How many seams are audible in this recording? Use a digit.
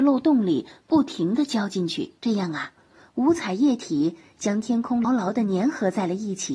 2